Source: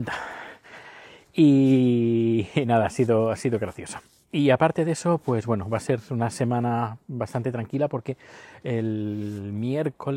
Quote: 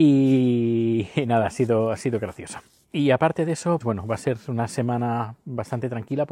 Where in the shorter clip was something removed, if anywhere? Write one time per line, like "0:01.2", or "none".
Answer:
0:03.8